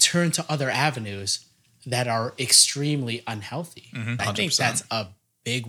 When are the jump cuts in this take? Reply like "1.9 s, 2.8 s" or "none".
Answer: 4.2 s